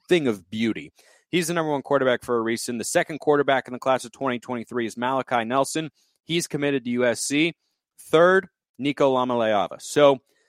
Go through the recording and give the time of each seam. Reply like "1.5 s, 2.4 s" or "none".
none